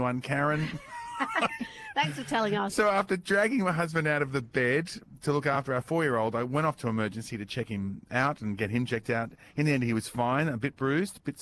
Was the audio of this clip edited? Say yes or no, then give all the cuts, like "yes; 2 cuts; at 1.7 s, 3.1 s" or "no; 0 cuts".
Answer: no; 0 cuts